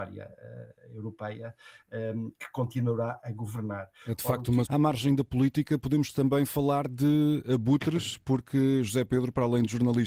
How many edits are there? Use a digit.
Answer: 1